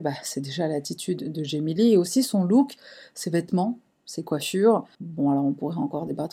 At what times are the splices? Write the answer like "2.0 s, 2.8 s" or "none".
4.9 s